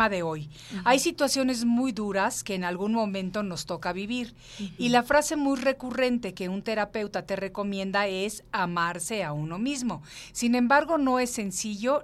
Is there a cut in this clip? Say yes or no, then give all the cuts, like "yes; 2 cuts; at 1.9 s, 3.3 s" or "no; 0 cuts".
no; 0 cuts